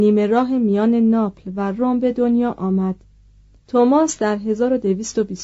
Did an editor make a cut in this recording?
yes; 1 cut; at 3.6 s

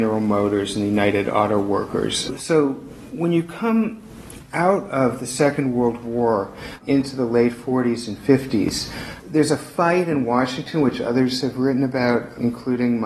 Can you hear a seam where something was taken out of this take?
no; 0 cuts

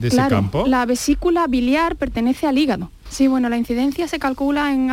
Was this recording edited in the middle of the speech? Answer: yes; 1 cut; at 3.1 s

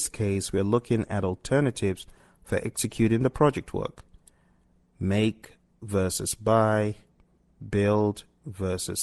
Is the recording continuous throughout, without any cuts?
yes; 0 cuts

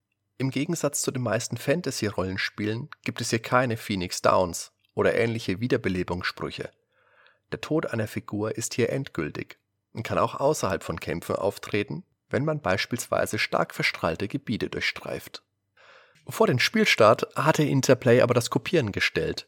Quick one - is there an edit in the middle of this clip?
no; 0 cuts

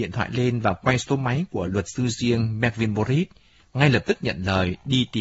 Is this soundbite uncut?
yes; 0 cuts

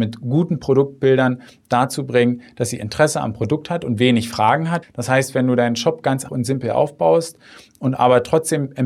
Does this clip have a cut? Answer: yes; 2 cuts; at 4.8 s, 6.3 s

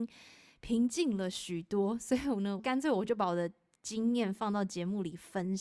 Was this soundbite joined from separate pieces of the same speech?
yes; 1 cut; at 2.6 s

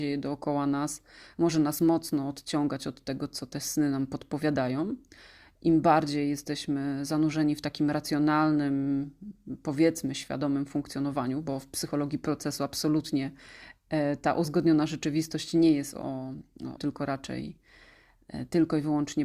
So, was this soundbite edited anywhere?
yes; 1 cut; at 16.8 s

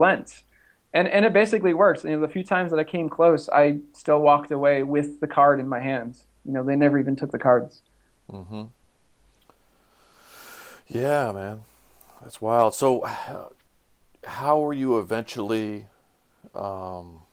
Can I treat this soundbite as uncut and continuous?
yes; 0 cuts

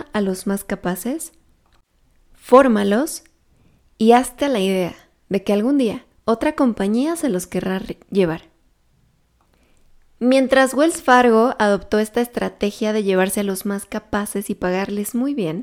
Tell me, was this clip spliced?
no; 0 cuts

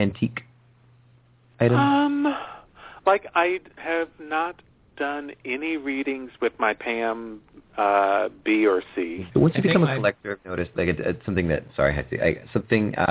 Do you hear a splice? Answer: yes; 2 cuts; at 9.3 s, 10.7 s

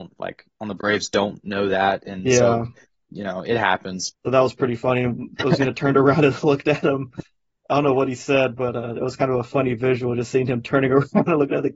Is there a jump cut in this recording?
yes; 2 cuts; at 3.0 s, 4.1 s

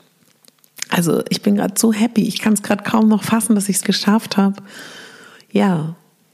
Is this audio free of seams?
no; 1 cut; at 3.8 s

